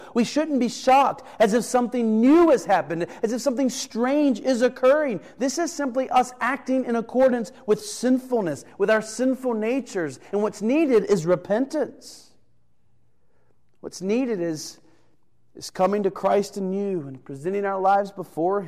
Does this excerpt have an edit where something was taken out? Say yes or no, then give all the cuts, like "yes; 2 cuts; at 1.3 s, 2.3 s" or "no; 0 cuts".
no; 0 cuts